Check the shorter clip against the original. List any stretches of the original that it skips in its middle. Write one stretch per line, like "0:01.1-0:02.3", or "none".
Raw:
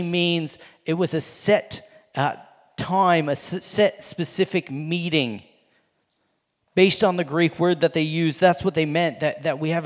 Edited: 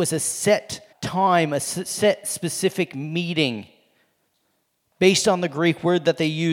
0:01.9-0:02.7